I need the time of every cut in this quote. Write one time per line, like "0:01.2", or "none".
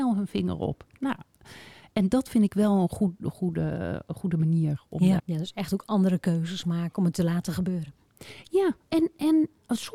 0:05.2